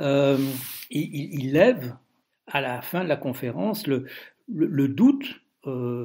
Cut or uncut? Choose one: uncut